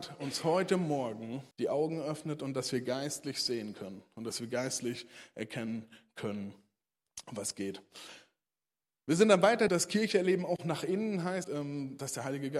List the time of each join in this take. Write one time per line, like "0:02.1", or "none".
0:01.5
0:09.7
0:11.4